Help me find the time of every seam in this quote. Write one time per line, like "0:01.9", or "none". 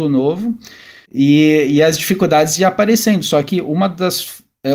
0:01.1